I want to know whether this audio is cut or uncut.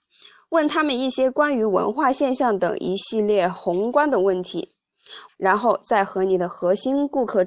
cut